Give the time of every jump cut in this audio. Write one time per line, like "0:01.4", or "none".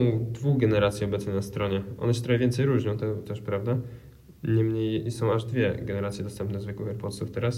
none